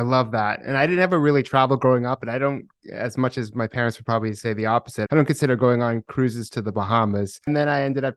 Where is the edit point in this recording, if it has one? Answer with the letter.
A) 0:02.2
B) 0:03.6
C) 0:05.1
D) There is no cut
C